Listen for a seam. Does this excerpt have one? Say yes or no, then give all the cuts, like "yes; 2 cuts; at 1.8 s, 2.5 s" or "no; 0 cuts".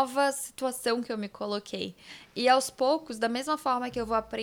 no; 0 cuts